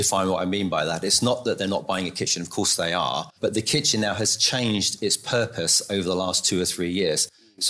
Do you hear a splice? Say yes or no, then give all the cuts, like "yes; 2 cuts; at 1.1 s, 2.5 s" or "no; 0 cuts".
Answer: yes; 1 cut; at 3.4 s